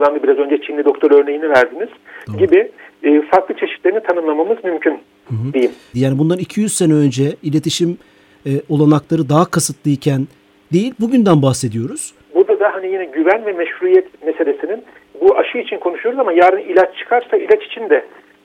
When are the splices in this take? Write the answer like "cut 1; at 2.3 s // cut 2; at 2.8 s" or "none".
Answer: cut 1; at 5.9 s // cut 2; at 12.3 s